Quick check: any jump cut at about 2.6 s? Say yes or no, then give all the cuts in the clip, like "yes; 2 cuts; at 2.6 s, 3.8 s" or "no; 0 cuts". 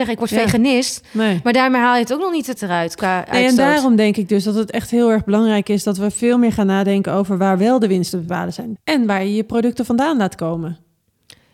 yes; 2 cuts; at 2.6 s, 8.8 s